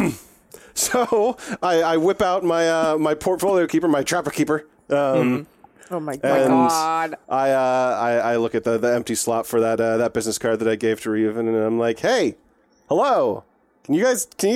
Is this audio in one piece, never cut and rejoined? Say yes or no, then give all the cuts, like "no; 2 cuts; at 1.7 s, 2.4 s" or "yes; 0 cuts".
no; 1 cut; at 7.2 s